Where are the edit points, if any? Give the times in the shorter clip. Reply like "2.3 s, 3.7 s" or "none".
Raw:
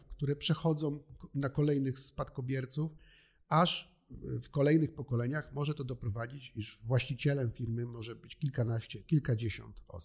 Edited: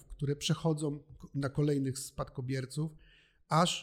none